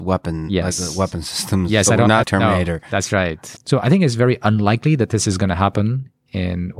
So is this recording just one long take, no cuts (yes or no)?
no